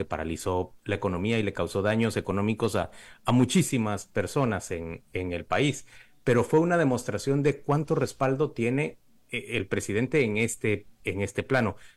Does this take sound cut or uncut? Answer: uncut